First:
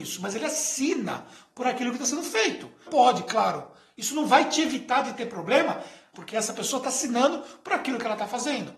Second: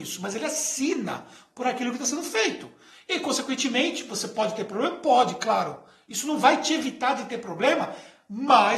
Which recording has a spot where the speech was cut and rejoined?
first; 2 cuts; at 2.9 s, 6.1 s

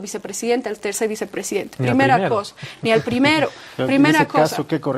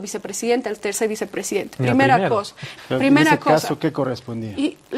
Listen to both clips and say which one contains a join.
second; 1 cut; at 2.8 s

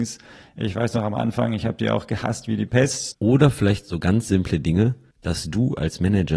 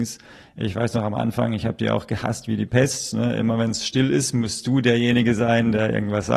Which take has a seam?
first; 1 cut; at 3.1 s

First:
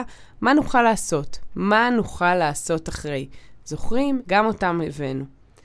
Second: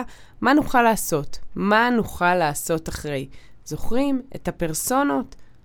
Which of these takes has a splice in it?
first; 1 cut; at 4.2 s

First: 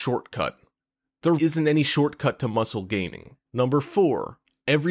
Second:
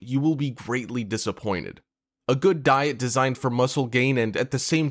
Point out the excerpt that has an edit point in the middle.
first; 2 cuts; at 1.4 s, 3.4 s

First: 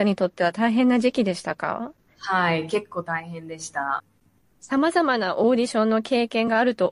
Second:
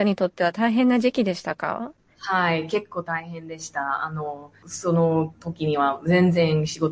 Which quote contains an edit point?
first; 1 cut; at 4.0 s

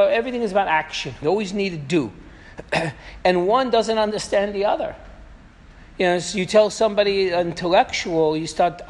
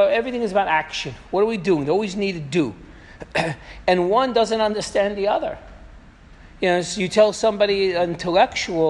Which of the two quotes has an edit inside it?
first; 1 cut; at 1.2 s

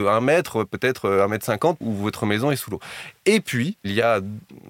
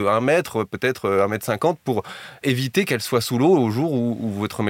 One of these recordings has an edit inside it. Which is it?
first; 1 cut; at 1.8 s

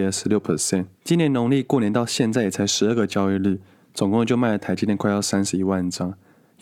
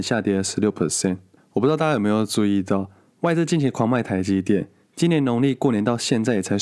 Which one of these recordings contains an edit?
first; 1 cut; at 0.9 s

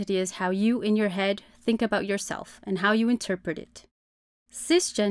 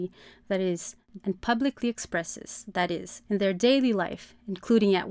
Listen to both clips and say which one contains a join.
second; 2 cuts; at 1.2 s, 3.2 s

